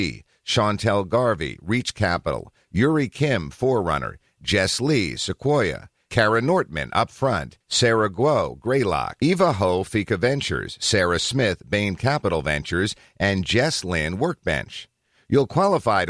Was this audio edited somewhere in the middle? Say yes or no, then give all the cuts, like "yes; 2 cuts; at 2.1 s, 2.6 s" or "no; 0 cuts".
yes; 1 cut; at 9.2 s